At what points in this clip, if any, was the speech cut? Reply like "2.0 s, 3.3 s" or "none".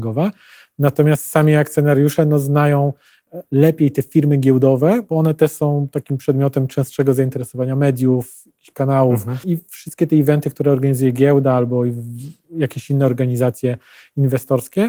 9.4 s